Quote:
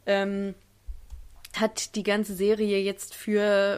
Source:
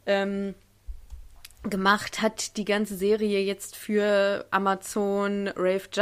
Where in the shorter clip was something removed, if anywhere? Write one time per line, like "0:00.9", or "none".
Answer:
0:01.5